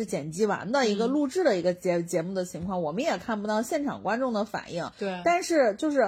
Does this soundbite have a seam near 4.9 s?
yes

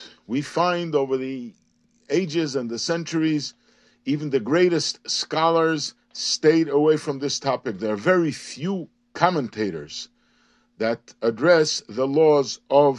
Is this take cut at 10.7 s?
no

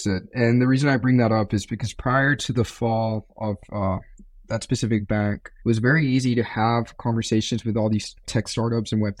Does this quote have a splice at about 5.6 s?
yes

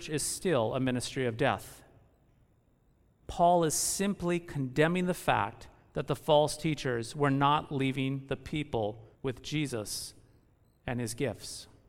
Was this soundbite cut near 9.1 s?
yes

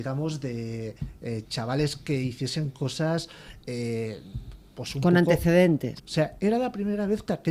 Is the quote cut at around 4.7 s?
no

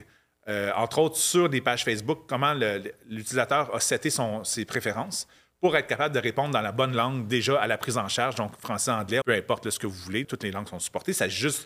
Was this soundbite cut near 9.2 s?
yes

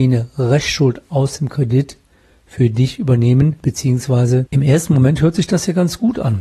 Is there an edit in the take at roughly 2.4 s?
no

